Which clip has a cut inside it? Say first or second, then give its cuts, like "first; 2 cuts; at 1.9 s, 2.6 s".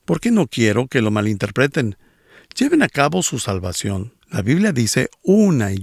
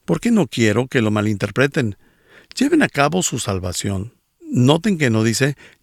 first; 1 cut; at 4.2 s